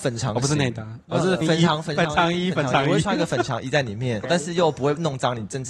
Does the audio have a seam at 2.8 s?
no; 2 cuts; at 1.4 s, 4.2 s

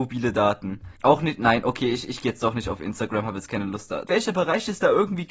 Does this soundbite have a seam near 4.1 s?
yes; 2 cuts; at 1.0 s, 4.1 s

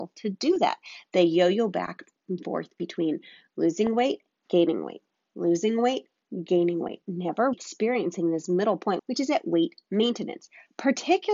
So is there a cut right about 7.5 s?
yes; 2 cuts; at 7.5 s, 9.0 s

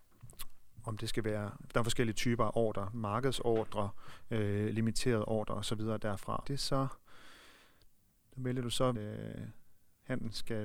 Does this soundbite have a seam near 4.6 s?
no; 2 cuts; at 6.4 s, 8.9 s

